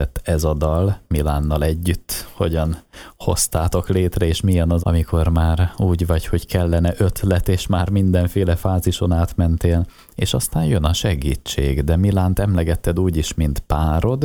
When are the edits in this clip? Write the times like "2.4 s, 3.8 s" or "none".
4.8 s